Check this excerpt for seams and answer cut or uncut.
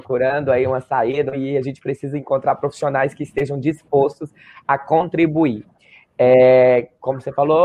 cut